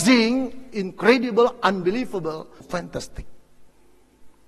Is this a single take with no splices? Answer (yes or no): no